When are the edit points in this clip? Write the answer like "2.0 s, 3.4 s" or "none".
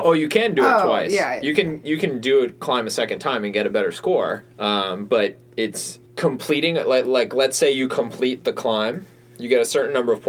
4.4 s, 6.1 s